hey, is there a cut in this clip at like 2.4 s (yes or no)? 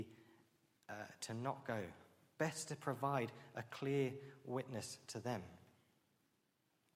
yes